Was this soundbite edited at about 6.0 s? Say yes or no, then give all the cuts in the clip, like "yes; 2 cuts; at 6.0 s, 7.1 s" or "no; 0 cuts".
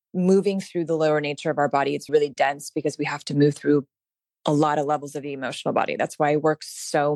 no; 1 cut; at 2.1 s